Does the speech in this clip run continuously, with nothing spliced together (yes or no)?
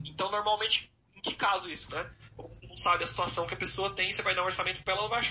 no